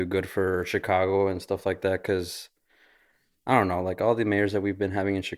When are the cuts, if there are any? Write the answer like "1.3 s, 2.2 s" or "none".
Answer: none